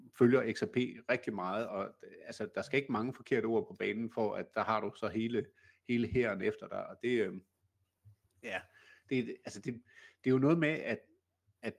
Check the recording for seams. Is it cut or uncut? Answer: uncut